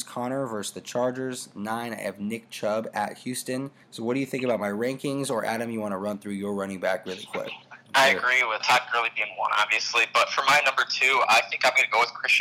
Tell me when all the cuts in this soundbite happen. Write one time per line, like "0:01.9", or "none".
0:03.8